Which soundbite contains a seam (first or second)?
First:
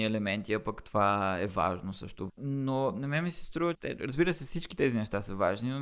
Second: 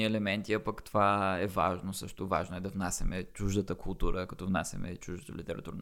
first